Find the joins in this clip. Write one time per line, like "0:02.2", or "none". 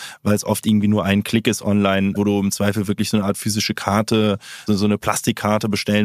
0:02.2
0:04.7